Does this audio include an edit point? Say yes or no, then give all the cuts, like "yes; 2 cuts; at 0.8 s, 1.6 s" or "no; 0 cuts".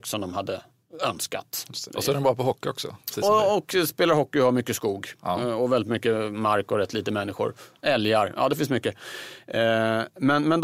no; 0 cuts